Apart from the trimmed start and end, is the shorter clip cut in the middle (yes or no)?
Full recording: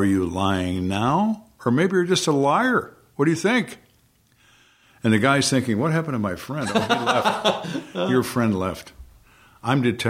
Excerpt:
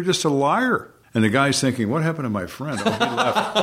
yes